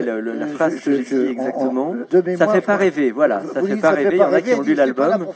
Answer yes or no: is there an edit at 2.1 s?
yes